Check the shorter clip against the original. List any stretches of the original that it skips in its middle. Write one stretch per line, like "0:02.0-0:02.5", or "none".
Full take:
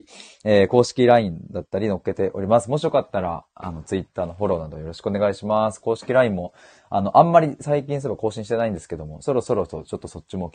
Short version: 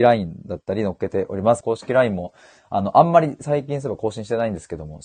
0:02.7-0:05.8